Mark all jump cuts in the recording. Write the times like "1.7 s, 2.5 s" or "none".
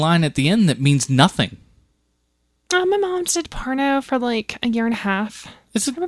3.2 s

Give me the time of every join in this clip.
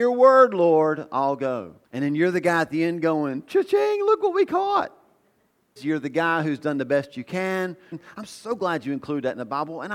1.8 s, 5.8 s, 7.9 s

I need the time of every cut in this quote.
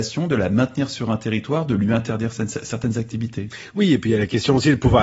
none

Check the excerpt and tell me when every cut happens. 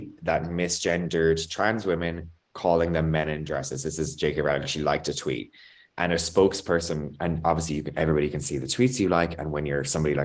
none

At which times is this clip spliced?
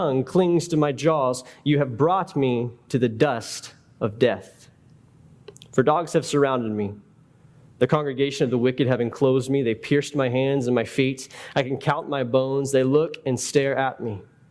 none

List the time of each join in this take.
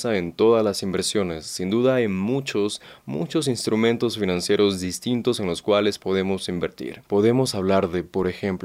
7.0 s

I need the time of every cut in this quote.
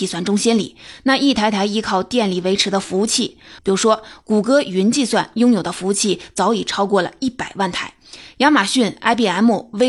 3.6 s

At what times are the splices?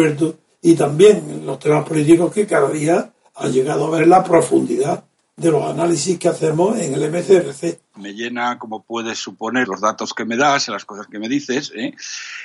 7.9 s, 9.6 s

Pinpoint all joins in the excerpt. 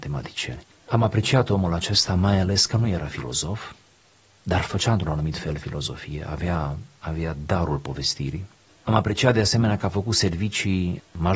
none

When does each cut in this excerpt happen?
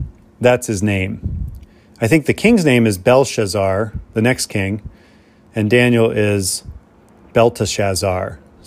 none

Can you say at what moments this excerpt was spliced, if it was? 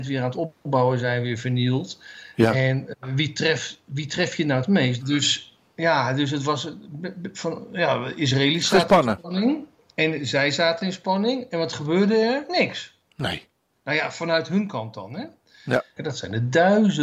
5.0 s, 16.0 s

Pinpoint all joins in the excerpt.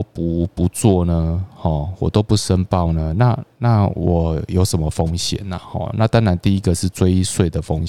none

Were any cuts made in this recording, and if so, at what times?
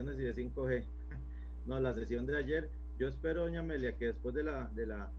none

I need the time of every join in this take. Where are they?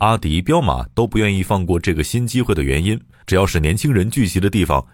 none

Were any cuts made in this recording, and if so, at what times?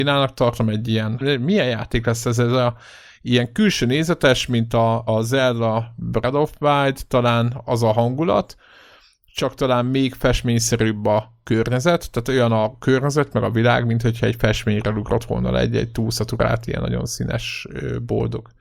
1.2 s, 5.1 s

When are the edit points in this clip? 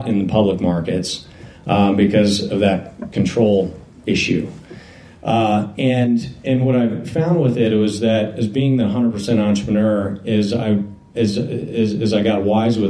none

